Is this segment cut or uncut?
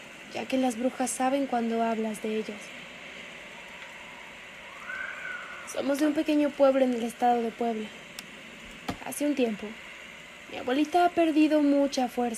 cut